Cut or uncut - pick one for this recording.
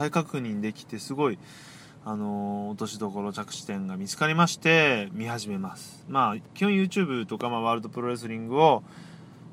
uncut